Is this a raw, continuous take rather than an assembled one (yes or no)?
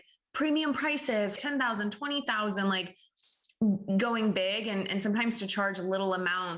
no